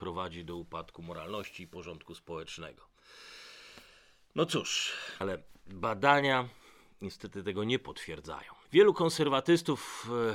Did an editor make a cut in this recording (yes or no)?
yes